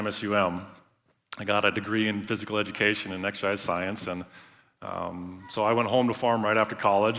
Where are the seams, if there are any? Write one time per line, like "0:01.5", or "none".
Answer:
none